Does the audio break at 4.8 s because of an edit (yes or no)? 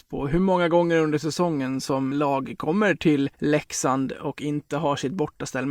no